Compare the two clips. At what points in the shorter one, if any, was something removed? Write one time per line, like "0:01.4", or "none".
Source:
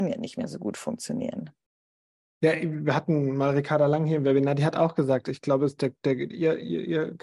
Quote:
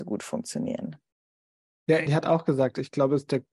0:02.1